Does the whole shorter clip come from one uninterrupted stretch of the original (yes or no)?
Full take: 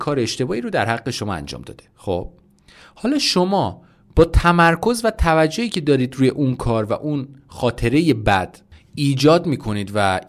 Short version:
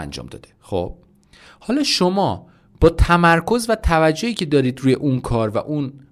yes